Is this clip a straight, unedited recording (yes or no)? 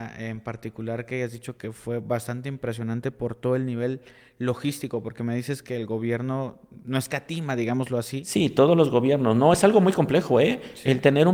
yes